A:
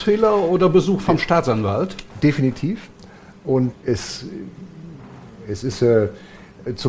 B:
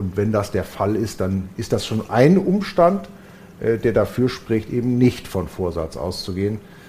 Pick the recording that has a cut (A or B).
A